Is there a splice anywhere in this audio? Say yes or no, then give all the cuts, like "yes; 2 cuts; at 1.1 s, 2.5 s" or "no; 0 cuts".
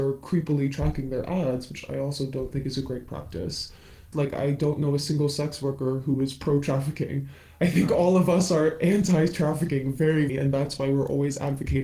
yes; 2 cuts; at 4.1 s, 10.3 s